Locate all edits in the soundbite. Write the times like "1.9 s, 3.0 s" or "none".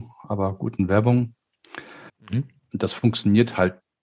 2.1 s